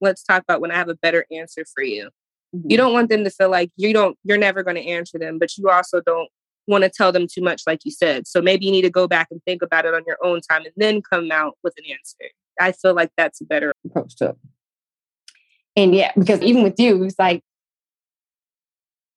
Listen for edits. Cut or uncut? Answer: cut